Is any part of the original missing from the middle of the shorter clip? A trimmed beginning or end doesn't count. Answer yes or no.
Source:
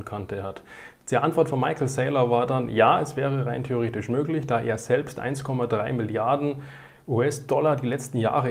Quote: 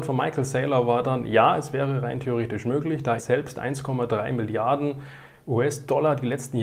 yes